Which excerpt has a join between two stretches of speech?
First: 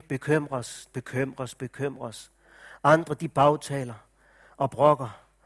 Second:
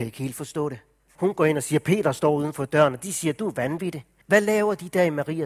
second; 2 cuts; at 1.1 s, 4.2 s

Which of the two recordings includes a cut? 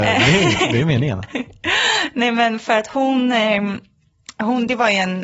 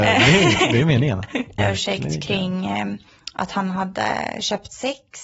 second; 1 cut; at 1.6 s

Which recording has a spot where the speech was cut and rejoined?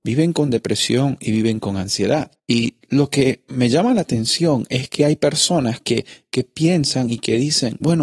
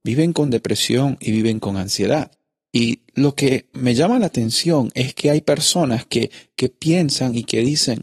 first; 1 cut; at 2.4 s

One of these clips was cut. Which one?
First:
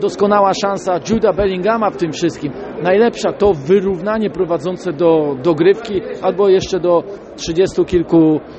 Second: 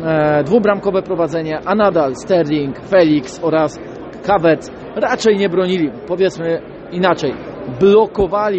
first; 1 cut; at 3.3 s

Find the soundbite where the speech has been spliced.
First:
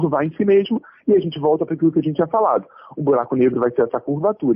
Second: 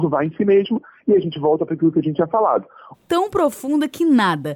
second; 1 cut; at 2.9 s

